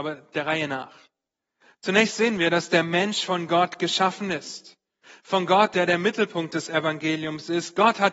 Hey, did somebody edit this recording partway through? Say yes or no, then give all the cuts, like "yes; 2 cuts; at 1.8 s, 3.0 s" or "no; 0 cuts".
no; 0 cuts